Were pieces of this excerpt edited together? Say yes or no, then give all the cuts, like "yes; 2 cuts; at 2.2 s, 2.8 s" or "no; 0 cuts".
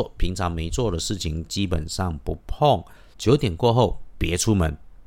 yes; 1 cut; at 3.1 s